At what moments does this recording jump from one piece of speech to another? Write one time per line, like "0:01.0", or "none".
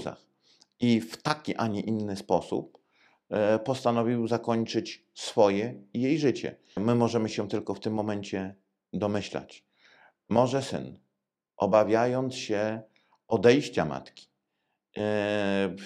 0:06.8